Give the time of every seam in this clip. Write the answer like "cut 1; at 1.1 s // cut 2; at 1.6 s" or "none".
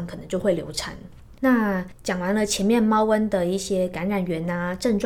cut 1; at 1.4 s

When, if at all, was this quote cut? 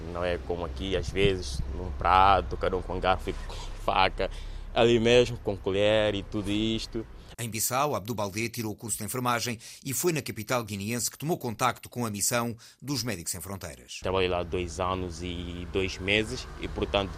cut 1; at 7.3 s

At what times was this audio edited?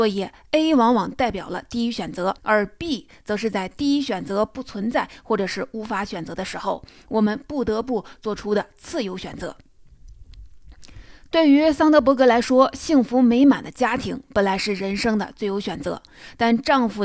cut 1; at 2.4 s

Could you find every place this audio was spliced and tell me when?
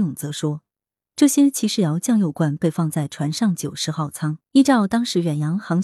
cut 1; at 4.4 s

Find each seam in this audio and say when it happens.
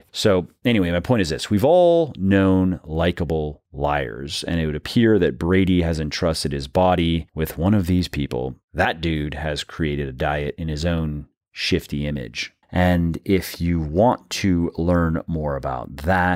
cut 1; at 12.6 s

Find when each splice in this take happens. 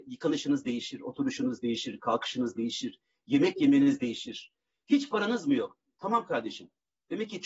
none

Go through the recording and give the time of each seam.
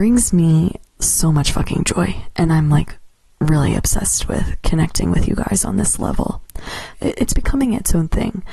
cut 1; at 6.9 s

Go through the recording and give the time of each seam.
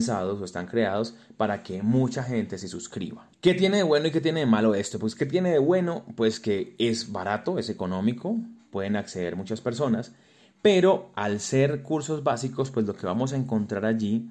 cut 1; at 3.3 s

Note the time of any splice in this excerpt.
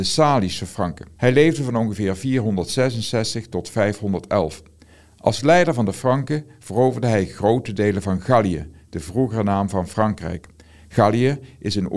cut 1; at 1.2 s

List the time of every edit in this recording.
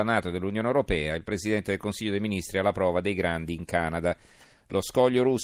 none

